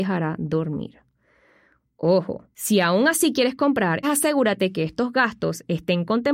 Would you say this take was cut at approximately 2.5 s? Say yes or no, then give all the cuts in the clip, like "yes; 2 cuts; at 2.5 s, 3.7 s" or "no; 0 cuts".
yes; 2 cuts; at 2.5 s, 4.0 s